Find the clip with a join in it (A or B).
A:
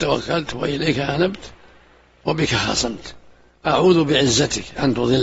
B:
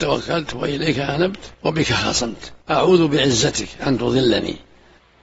B